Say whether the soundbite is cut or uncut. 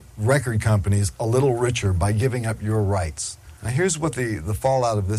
cut